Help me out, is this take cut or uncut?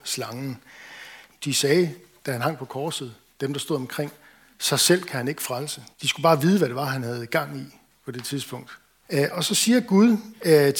cut